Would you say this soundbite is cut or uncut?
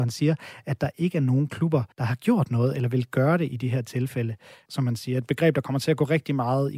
cut